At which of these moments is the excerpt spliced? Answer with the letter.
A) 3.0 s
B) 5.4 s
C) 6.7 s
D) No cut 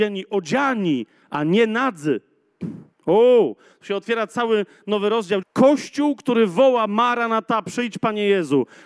B